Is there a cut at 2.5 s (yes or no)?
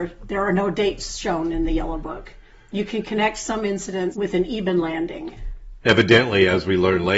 no